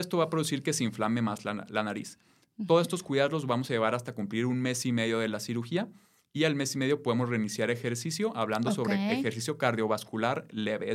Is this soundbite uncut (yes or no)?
no